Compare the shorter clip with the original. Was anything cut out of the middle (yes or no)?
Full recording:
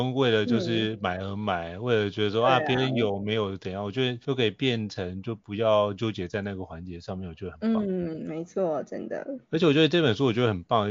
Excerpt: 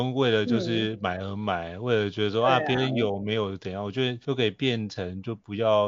no